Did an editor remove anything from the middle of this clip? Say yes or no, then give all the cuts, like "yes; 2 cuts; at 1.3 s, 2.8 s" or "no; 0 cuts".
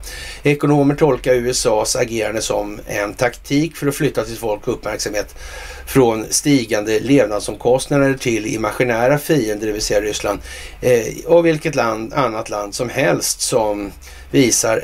no; 0 cuts